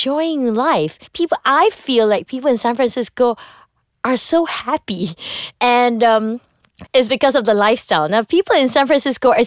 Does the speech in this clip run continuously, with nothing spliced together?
no; 3 cuts; at 1.1 s, 5.5 s, 6.9 s

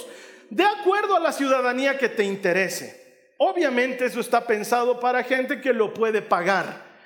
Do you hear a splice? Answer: no; 0 cuts

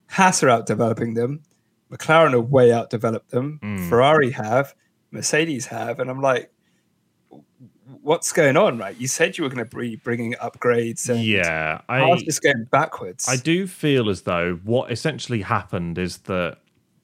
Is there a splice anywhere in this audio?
no; 0 cuts

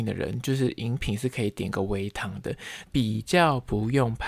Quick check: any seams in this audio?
yes; 1 cut; at 2.8 s

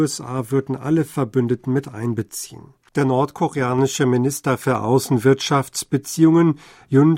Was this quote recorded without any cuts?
no; 1 cut; at 2.9 s

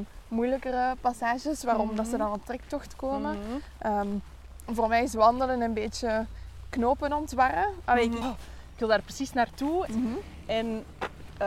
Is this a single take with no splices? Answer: no; 2 cuts; at 8.2 s, 9.9 s

